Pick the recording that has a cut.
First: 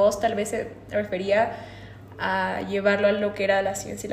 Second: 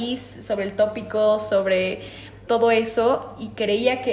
second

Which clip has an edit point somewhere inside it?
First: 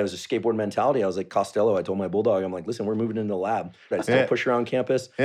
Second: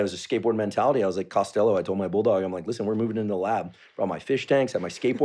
first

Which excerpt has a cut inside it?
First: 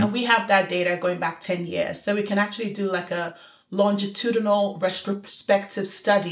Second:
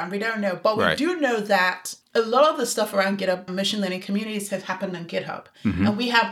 second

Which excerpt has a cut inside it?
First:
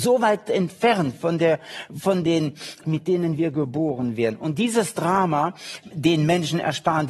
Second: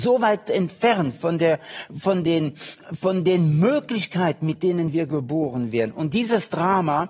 first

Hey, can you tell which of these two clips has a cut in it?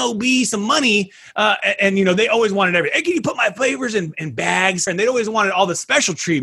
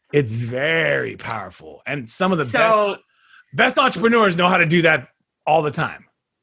first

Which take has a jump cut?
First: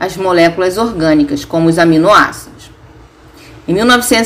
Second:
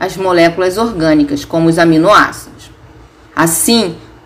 second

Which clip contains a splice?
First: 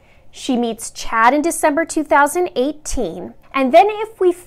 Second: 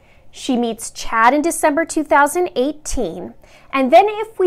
first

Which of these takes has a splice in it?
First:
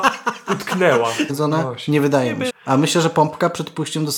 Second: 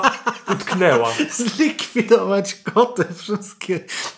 first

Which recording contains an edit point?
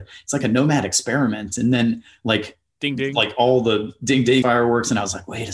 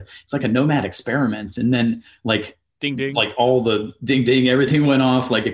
first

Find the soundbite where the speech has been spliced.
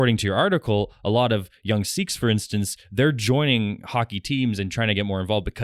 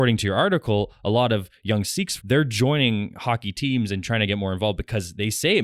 second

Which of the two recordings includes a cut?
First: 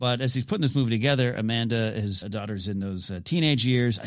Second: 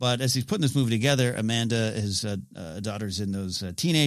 first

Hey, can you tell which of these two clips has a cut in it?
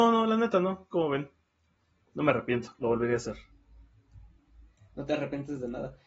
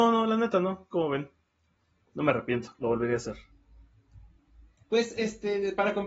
second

